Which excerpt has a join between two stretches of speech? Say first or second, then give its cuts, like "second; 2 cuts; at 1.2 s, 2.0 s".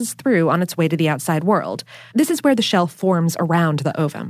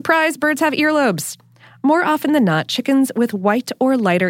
first; 1 cut; at 2.1 s